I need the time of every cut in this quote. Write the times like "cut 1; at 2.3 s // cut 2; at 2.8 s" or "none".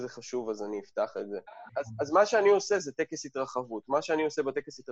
cut 1; at 1.7 s